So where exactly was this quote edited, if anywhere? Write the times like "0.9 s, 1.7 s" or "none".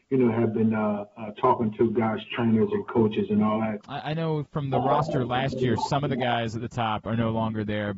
3.8 s